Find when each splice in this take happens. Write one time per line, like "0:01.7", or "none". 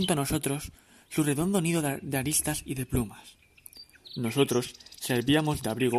none